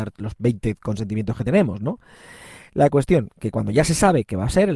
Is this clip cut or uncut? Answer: uncut